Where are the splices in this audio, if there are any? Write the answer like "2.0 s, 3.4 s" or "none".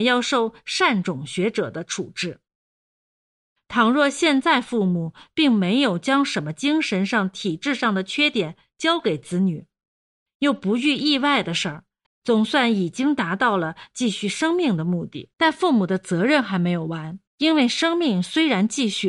12.1 s, 15.3 s, 17.3 s